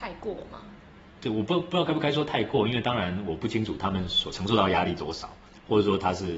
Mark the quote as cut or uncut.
uncut